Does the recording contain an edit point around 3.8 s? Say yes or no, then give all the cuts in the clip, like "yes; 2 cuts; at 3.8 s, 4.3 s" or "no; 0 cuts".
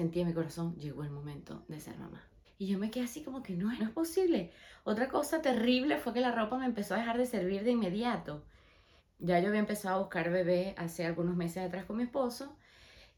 yes; 3 cuts; at 2.4 s, 3.8 s, 9.0 s